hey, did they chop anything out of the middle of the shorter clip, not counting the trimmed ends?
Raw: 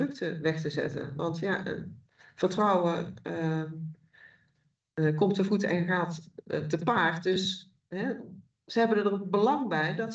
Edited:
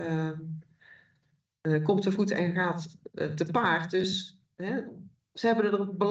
no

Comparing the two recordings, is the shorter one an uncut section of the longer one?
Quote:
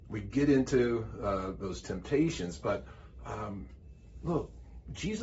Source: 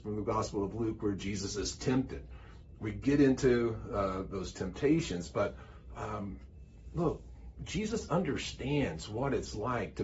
yes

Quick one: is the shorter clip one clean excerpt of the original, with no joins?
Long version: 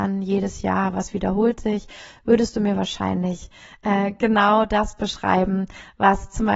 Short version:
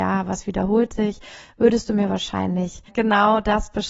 no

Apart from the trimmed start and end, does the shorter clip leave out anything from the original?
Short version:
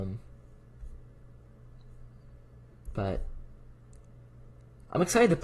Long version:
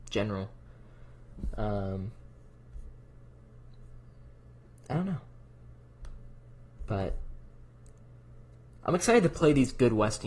yes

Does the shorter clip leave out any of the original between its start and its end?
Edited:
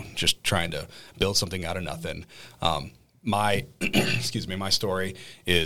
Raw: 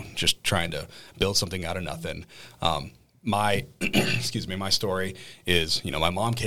no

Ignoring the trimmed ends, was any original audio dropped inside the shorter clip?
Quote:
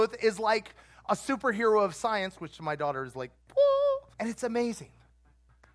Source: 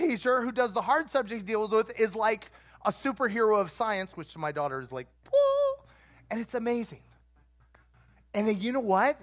yes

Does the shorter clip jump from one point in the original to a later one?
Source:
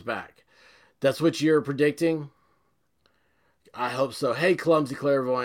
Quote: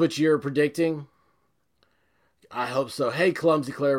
no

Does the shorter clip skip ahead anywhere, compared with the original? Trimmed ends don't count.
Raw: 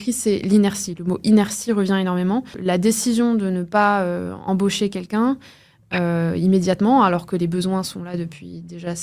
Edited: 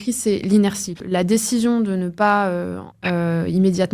yes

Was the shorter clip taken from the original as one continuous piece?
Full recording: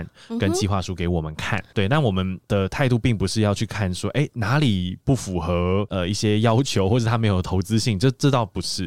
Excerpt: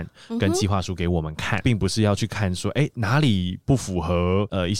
no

